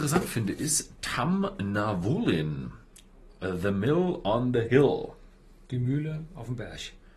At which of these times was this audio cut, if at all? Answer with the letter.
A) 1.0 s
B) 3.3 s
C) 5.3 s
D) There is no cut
D